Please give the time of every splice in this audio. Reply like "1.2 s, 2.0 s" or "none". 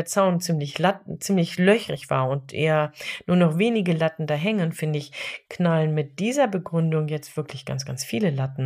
none